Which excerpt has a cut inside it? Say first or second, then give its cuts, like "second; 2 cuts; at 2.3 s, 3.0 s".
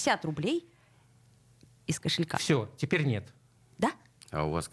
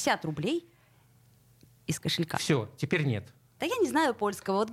second; 1 cut; at 3.6 s